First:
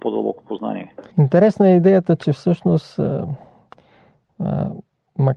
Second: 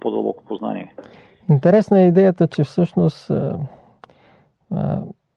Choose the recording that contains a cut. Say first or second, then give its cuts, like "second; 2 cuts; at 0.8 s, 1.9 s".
first; 1 cut; at 1.1 s